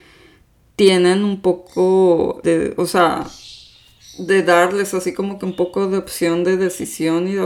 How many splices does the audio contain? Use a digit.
1